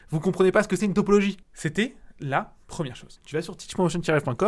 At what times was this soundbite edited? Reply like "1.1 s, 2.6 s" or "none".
1.4 s, 3.2 s